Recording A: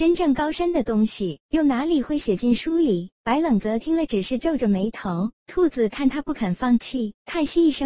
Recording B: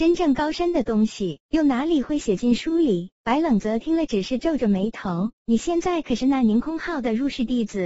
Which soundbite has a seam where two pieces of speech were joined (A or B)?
B